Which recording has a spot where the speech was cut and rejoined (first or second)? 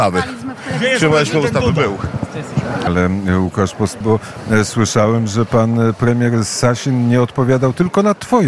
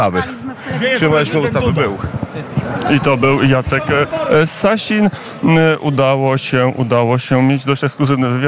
first